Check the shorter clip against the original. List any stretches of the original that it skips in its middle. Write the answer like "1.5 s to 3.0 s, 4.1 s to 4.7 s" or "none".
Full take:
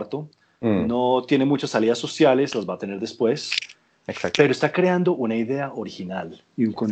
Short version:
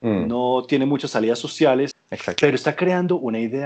2.5 s to 3.9 s